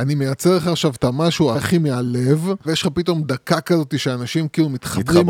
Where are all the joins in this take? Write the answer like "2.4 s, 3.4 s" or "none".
1.5 s, 2.6 s